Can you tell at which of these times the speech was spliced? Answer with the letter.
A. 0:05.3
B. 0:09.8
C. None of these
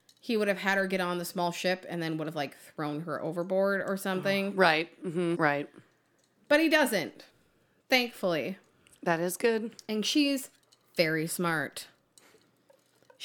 A